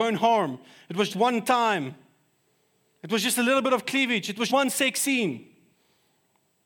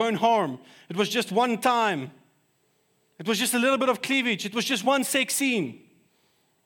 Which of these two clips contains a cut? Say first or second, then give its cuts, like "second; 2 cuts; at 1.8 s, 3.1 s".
first; 2 cuts; at 1.1 s, 4.5 s